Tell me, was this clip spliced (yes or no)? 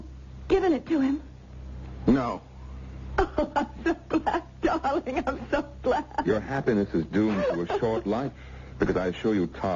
no